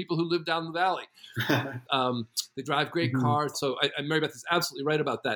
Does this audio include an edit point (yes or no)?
yes